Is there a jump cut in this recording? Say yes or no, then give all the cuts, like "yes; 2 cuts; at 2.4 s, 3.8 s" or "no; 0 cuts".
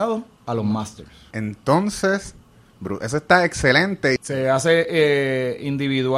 yes; 2 cuts; at 1.3 s, 4.2 s